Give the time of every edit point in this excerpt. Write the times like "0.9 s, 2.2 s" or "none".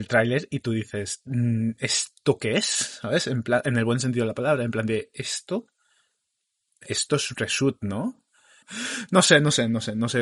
8.6 s